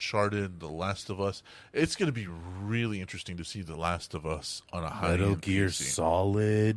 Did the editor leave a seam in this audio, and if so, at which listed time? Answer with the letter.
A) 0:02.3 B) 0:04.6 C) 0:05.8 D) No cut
D